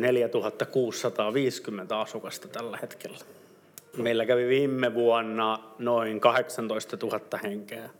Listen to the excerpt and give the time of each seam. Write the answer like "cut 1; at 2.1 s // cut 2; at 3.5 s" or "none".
cut 1; at 3.9 s